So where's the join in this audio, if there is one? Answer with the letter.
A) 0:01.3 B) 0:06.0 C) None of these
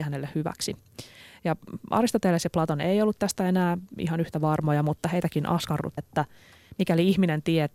B